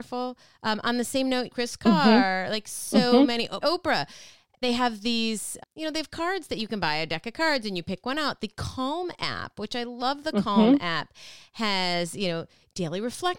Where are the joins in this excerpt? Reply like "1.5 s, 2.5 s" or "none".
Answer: 1.5 s, 3.6 s, 5.6 s